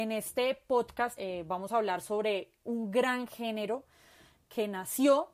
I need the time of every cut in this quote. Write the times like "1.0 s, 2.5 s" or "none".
1.2 s